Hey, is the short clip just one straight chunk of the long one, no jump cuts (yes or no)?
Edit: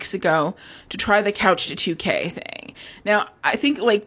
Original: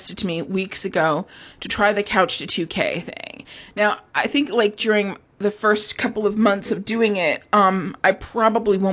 yes